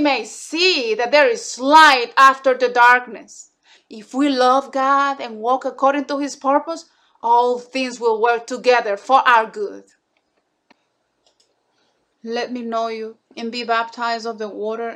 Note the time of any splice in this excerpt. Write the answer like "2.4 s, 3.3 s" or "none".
3.8 s, 12.1 s, 13.3 s